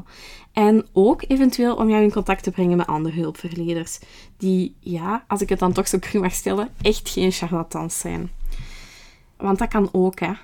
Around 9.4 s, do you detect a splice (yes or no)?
yes